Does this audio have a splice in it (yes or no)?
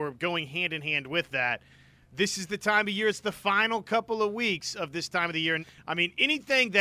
yes